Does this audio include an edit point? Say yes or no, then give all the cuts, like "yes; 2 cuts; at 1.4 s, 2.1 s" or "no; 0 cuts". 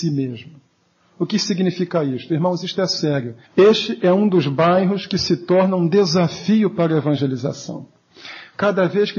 yes; 1 cut; at 3.4 s